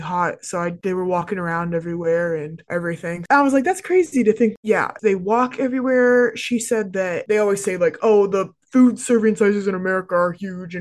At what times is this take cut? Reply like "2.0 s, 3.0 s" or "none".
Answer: 3.3 s, 4.6 s